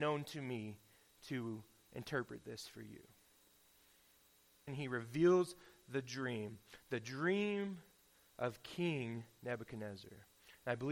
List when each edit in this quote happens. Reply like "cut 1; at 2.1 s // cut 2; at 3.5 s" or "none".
cut 1; at 4.7 s